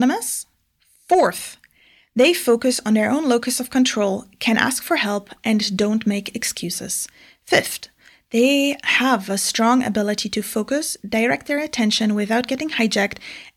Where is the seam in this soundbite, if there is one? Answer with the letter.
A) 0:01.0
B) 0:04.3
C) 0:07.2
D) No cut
D